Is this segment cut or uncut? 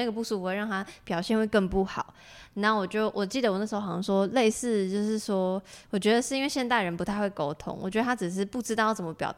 uncut